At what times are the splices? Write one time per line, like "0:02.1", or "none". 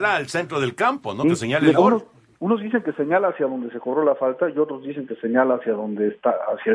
none